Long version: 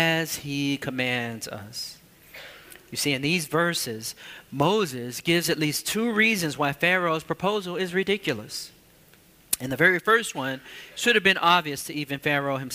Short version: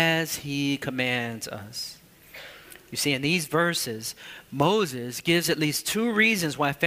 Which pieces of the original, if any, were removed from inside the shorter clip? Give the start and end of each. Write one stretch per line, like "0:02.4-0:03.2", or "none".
none